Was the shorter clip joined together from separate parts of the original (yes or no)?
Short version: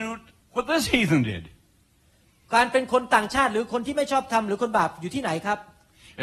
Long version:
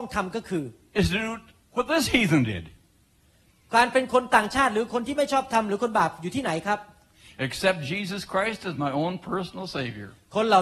no